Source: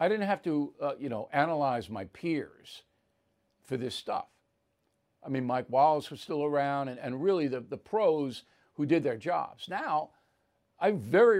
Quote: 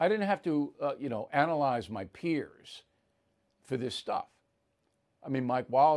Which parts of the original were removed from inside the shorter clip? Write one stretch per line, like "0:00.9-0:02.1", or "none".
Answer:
none